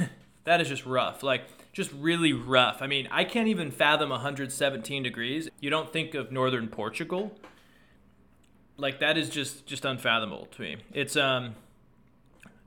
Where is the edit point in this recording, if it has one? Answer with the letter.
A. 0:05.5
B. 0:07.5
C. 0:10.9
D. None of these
A